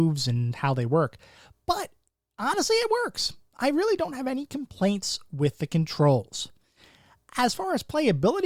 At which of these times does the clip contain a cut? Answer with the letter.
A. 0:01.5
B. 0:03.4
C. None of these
C